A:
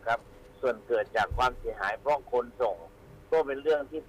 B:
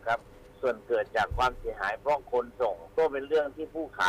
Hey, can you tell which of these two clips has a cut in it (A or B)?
B